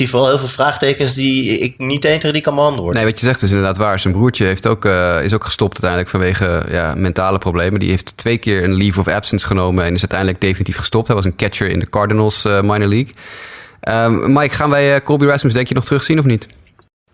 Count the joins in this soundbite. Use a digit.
0